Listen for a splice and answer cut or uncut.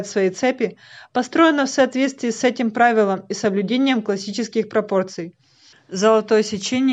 cut